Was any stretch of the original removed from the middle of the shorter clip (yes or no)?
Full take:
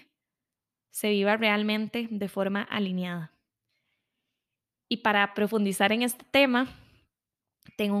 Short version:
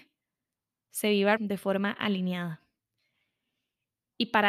yes